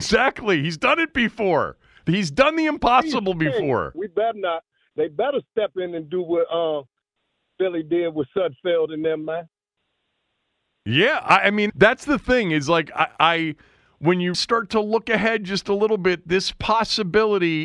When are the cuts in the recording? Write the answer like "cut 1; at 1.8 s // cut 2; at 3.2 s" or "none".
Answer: cut 1; at 3.9 s // cut 2; at 11.7 s // cut 3; at 14.3 s